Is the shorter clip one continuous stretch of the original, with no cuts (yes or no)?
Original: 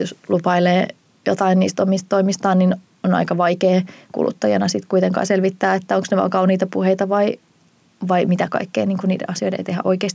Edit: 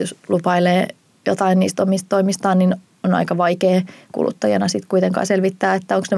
yes